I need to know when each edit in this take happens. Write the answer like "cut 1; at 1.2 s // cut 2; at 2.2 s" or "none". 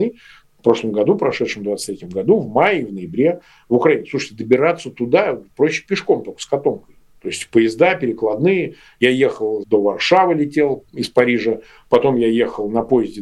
cut 1; at 9.6 s // cut 2; at 10.9 s